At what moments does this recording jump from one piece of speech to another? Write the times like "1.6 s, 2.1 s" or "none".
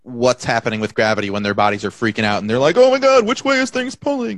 none